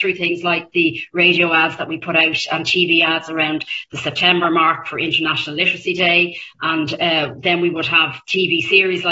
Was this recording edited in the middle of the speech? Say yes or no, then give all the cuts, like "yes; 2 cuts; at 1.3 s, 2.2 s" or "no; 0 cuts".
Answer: no; 0 cuts